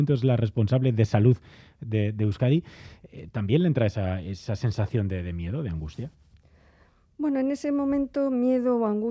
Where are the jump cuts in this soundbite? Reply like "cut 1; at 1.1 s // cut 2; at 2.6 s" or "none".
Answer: none